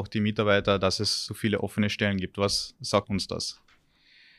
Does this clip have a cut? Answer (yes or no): yes